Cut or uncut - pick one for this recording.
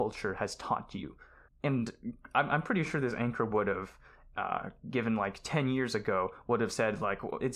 cut